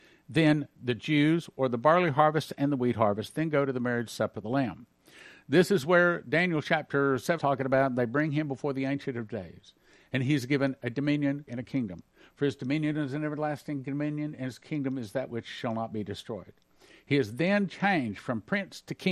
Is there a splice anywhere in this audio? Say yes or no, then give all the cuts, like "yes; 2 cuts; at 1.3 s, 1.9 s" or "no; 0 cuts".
yes; 2 cuts; at 7.4 s, 11.5 s